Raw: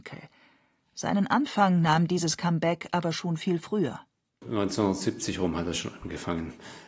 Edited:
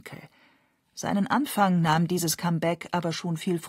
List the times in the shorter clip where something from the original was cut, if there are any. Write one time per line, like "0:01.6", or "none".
none